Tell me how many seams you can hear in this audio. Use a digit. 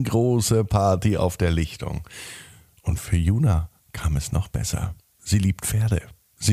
0